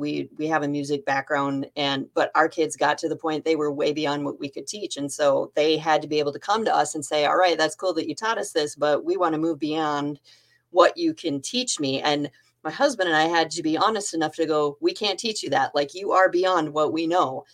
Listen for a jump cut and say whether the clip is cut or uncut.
uncut